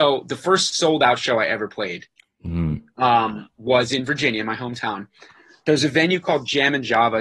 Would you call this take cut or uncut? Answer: uncut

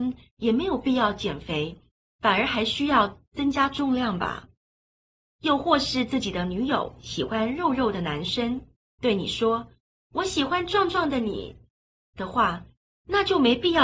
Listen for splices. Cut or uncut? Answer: uncut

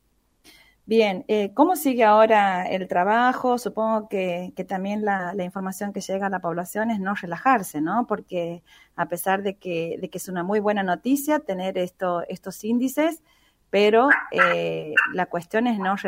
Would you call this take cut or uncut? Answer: uncut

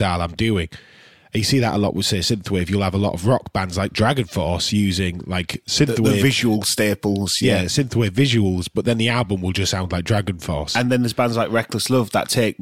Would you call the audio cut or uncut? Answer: uncut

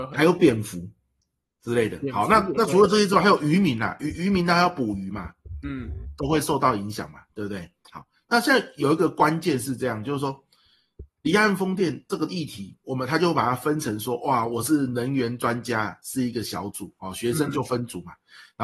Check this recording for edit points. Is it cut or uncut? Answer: uncut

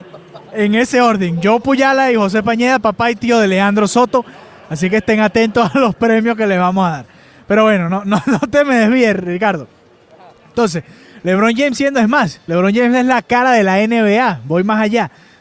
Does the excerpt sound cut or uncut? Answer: uncut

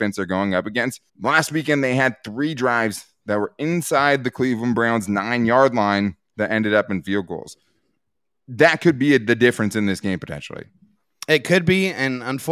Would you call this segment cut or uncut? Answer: cut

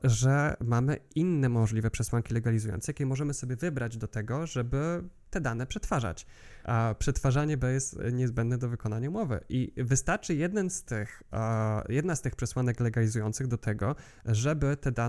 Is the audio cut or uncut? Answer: cut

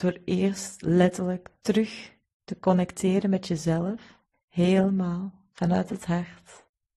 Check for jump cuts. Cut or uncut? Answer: cut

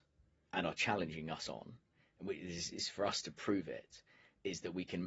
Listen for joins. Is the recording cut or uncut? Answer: uncut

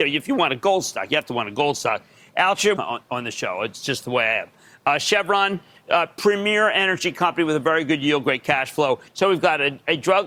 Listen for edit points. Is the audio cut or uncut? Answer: cut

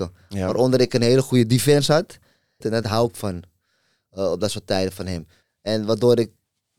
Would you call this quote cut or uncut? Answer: cut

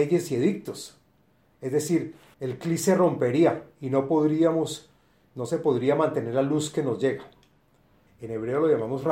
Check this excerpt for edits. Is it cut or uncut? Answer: cut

